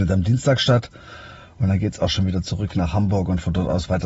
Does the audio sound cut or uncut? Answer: uncut